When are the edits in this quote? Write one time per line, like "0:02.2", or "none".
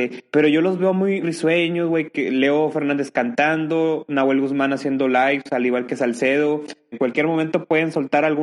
0:01.2
0:06.9